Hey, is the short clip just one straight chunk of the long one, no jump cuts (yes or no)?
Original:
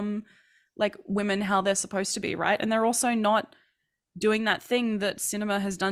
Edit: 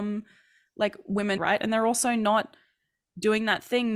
no